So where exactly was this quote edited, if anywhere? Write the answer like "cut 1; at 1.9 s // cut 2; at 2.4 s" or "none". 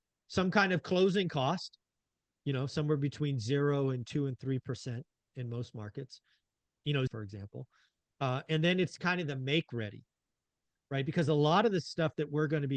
cut 1; at 7.1 s